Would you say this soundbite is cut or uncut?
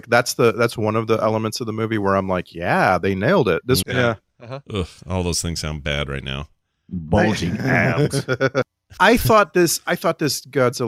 cut